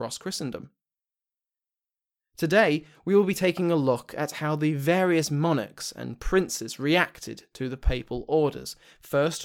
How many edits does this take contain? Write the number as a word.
zero